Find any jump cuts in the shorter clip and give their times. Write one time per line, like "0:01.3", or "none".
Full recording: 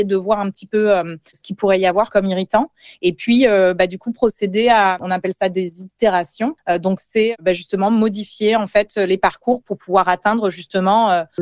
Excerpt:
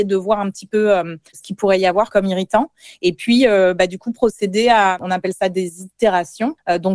none